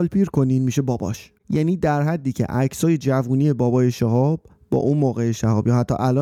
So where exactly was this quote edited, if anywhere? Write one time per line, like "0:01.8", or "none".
0:01.4